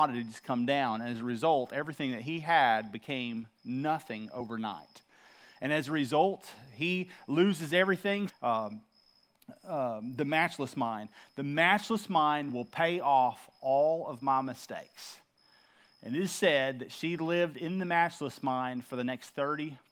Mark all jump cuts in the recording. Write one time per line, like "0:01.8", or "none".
0:08.3